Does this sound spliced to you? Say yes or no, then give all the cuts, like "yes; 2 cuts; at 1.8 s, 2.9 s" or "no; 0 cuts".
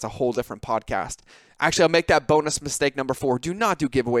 no; 0 cuts